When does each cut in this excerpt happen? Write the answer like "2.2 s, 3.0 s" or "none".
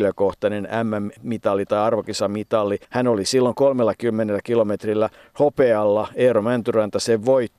2.8 s